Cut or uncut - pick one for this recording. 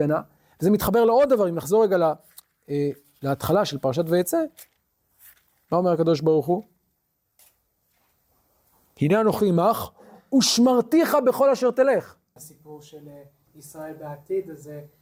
cut